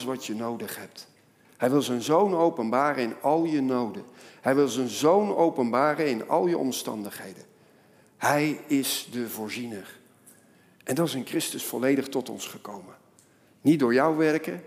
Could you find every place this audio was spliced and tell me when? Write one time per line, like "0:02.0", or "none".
none